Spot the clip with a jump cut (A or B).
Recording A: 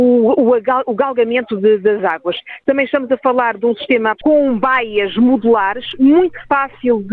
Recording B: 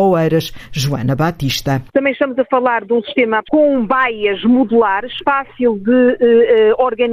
B